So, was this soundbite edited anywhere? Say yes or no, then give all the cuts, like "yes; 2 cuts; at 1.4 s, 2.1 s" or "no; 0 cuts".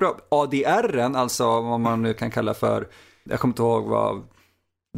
yes; 1 cut; at 3.3 s